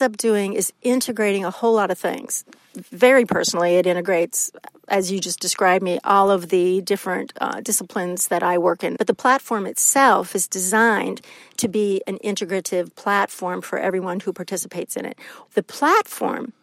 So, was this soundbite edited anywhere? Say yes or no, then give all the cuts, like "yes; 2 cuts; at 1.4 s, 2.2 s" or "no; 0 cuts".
yes; 2 cuts; at 9.0 s, 15.5 s